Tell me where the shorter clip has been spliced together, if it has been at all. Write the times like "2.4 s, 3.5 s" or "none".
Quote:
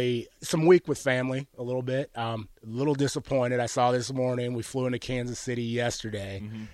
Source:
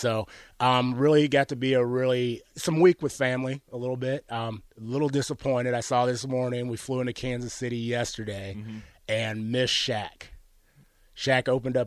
none